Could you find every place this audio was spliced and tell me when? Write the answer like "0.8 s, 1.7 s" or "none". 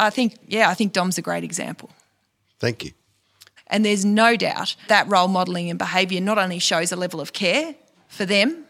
3.6 s, 4.9 s